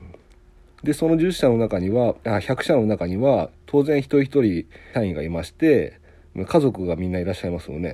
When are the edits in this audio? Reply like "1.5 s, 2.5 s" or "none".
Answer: 4.9 s